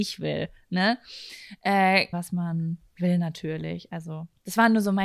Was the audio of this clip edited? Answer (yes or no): yes